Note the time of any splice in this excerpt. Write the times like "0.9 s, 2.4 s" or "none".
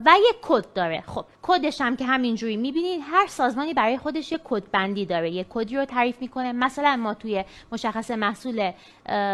1.3 s